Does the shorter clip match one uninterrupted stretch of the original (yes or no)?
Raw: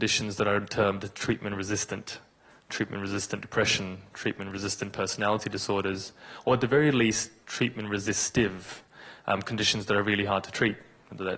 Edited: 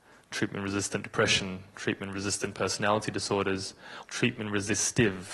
no